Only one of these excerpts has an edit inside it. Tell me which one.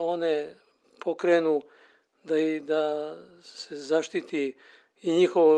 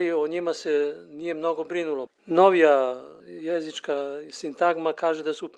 second; 2 cuts; at 2.1 s, 3.2 s

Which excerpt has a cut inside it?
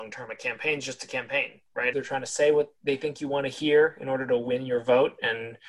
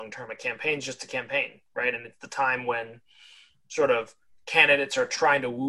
first; 1 cut; at 1.9 s

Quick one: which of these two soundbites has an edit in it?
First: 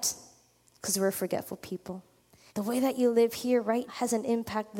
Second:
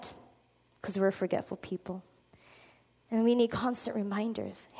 first; 2 cuts; at 2.5 s, 3.9 s

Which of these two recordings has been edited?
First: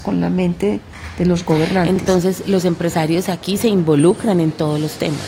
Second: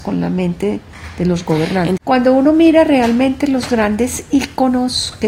second; 1 cut; at 2.0 s

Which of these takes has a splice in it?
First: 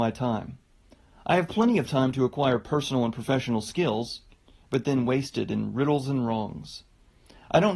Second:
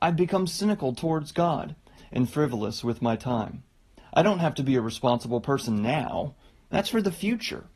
second; 2 cuts; at 2.0 s, 4.0 s

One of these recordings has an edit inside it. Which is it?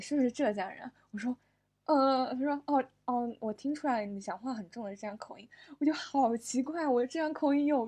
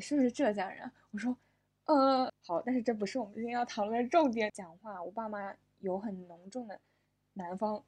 second; 2 cuts; at 2.3 s, 4.5 s

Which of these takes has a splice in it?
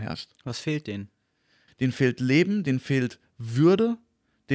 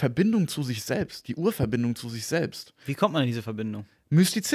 first; 1 cut; at 1.7 s

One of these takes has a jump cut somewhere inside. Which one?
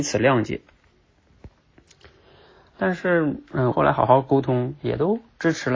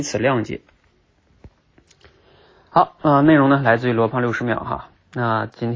first; 2 cuts; at 2.7 s, 3.7 s

